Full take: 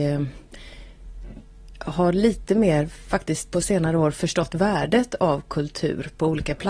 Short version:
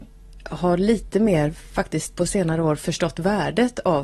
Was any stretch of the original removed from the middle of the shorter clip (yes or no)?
no